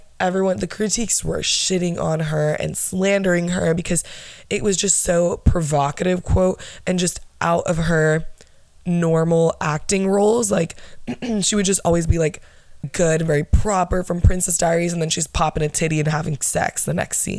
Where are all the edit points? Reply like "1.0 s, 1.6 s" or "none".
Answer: 12.8 s

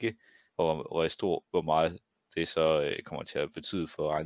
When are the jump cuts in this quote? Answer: 1.4 s

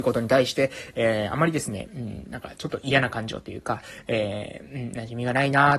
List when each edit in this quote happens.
none

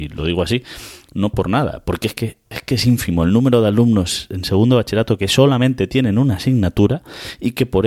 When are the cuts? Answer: 2.5 s

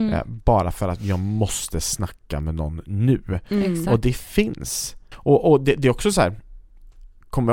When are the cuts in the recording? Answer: 5.1 s

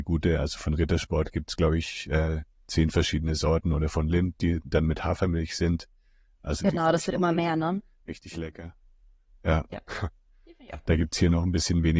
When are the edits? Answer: none

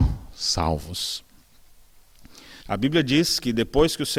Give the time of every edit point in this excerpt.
2.6 s

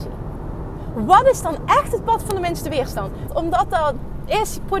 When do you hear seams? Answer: 3.3 s

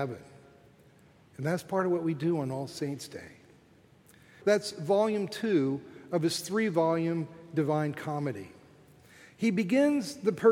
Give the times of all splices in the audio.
4.4 s

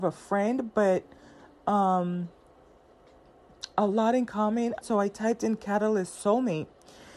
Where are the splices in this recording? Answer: 4.8 s

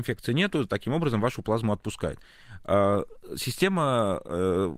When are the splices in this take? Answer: none

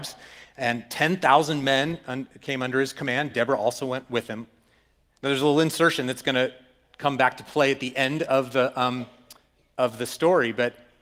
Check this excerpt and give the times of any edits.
none

